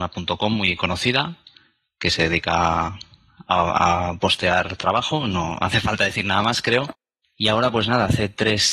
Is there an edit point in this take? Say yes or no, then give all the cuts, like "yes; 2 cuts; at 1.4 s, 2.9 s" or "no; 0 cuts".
yes; 1 cut; at 7.2 s